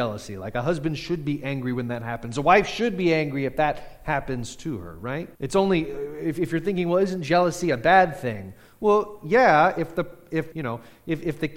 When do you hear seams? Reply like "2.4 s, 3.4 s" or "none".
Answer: 5.4 s, 10.5 s